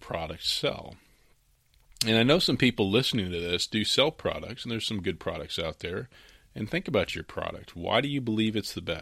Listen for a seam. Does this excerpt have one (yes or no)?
no